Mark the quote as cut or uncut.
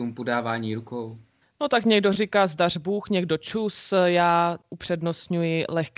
uncut